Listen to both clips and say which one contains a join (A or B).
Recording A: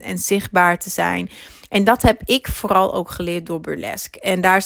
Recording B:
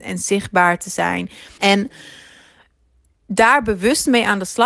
B